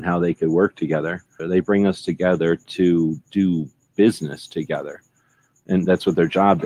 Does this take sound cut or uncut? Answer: cut